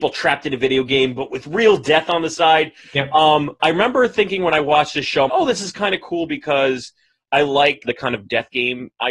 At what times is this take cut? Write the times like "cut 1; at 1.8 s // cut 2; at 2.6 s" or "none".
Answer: cut 1; at 5.3 s // cut 2; at 7.8 s